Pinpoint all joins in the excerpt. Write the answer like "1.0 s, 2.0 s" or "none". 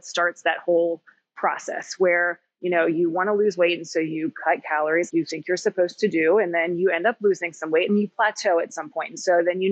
5.1 s, 7.9 s